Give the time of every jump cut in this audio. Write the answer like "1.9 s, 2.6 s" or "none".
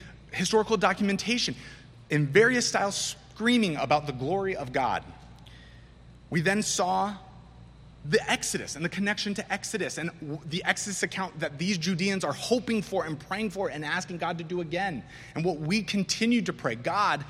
none